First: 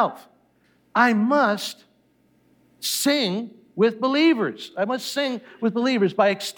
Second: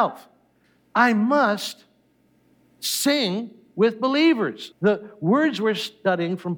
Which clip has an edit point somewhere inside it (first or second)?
second